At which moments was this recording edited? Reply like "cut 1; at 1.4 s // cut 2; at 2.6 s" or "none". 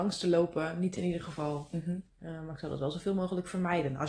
cut 1; at 1.0 s // cut 2; at 2.1 s